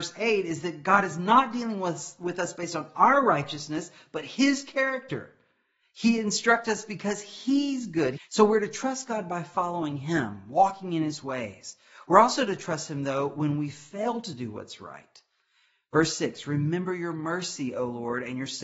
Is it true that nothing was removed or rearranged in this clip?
no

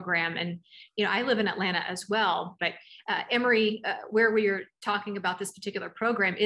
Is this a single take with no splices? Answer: no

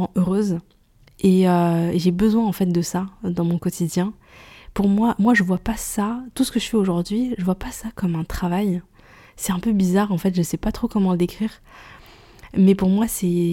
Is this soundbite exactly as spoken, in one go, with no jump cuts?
yes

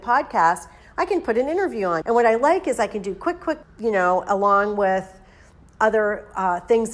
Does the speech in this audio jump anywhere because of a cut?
yes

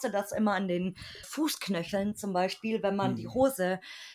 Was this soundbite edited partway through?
yes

